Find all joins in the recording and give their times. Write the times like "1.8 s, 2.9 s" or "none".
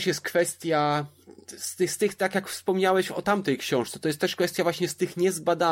none